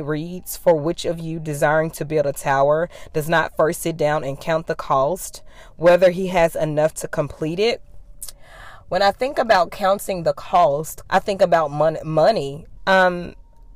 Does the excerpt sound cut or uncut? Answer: cut